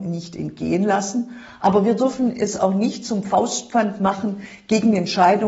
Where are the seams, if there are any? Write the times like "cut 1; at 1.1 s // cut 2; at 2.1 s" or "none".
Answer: none